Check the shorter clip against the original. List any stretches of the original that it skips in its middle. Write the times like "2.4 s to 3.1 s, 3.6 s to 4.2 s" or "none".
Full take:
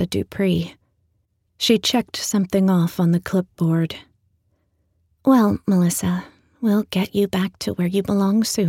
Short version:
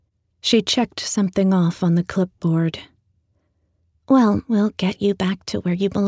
5.6 s to 6.6 s